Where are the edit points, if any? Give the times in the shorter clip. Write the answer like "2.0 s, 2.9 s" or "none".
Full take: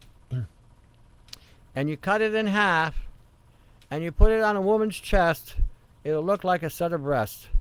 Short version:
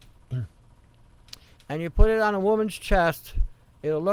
1.6 s